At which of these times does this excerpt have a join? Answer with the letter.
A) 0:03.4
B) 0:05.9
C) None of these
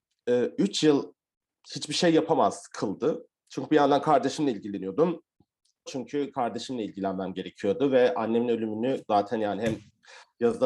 B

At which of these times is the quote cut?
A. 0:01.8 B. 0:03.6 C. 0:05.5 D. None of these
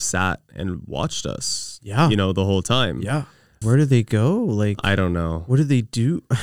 B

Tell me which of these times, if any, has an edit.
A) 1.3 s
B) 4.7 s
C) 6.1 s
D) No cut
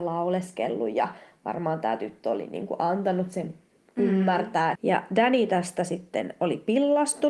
B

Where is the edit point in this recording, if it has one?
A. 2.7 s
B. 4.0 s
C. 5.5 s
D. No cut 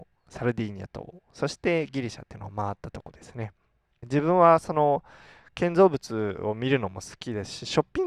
B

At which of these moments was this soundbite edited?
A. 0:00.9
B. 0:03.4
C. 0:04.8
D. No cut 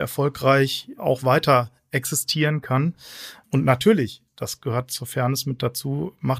B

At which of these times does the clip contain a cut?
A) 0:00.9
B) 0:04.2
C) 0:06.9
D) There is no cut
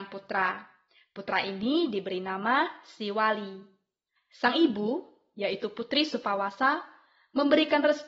B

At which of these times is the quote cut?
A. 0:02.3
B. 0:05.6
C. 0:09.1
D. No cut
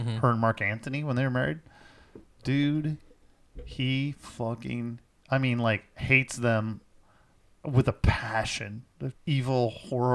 C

